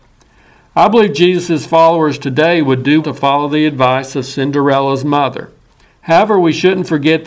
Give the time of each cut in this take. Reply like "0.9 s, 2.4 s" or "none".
3.0 s, 5.9 s